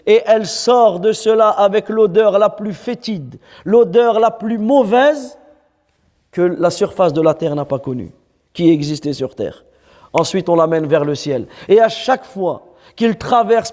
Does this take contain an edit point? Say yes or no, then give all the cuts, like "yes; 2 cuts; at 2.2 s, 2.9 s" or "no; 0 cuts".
no; 0 cuts